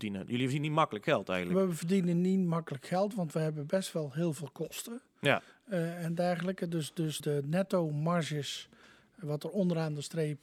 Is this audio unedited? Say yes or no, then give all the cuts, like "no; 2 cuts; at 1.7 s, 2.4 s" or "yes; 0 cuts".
no; 1 cut; at 7.2 s